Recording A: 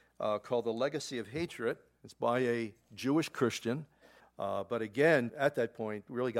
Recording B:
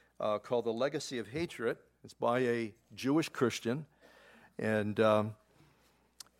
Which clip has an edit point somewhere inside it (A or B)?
A